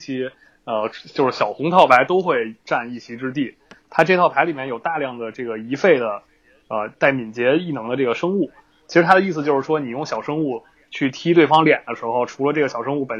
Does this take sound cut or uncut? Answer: cut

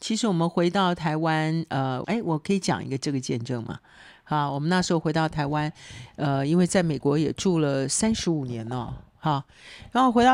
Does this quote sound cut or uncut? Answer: cut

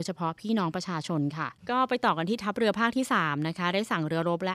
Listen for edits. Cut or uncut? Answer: cut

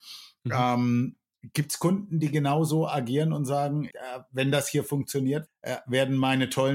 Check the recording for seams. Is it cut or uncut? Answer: cut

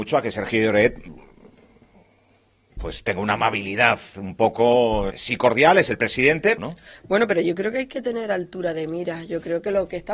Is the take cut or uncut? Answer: cut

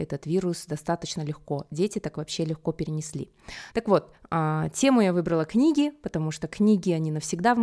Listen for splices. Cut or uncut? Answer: cut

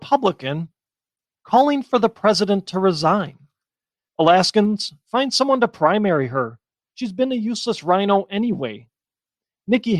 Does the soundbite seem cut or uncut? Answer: cut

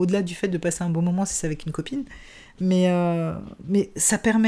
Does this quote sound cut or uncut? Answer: uncut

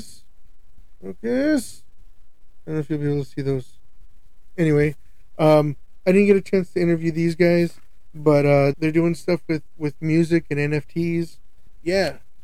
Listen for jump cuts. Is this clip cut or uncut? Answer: cut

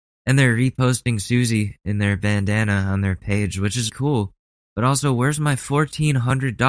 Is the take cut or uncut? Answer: cut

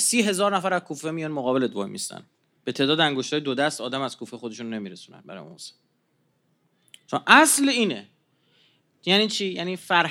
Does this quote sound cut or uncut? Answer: uncut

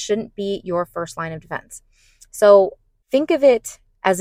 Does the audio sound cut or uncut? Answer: cut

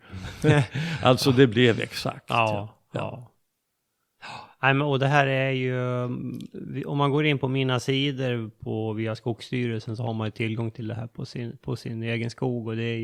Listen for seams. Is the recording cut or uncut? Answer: uncut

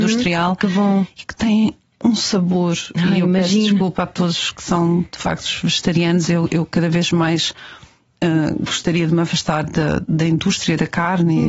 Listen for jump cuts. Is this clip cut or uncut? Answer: uncut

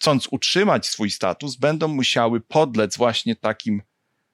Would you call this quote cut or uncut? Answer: uncut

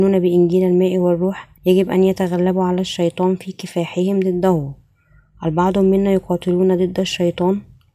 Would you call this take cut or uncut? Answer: cut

